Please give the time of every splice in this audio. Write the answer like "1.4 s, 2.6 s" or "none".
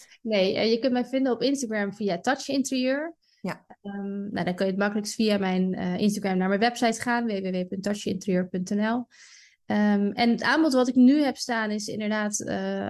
none